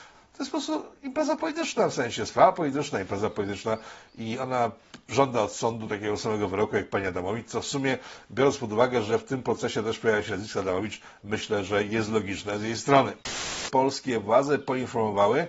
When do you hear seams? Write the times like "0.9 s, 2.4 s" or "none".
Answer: 13.7 s